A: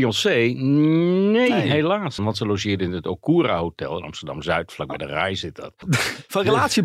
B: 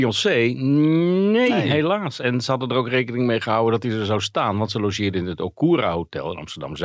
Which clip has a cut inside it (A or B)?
A